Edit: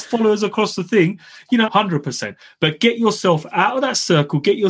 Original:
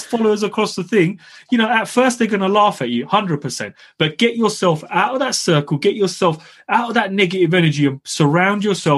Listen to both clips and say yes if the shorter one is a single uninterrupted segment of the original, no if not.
no